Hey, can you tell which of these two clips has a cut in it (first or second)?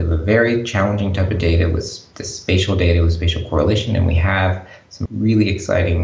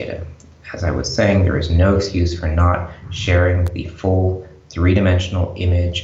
first